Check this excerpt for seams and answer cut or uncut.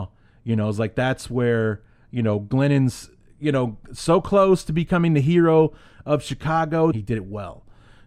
cut